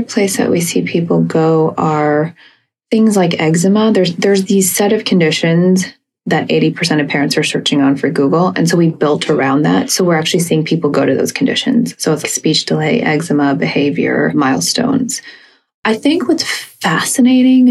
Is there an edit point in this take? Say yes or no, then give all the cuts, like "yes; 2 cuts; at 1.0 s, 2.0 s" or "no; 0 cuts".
yes; 1 cut; at 12.2 s